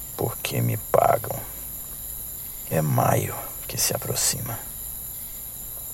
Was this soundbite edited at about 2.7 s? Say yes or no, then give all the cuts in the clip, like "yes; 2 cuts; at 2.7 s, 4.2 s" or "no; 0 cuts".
yes; 1 cut; at 2.7 s